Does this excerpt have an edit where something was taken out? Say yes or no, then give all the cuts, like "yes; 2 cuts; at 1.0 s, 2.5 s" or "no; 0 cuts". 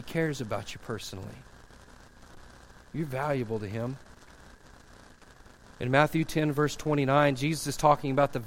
no; 0 cuts